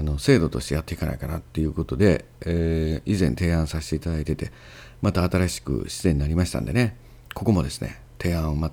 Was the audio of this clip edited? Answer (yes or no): no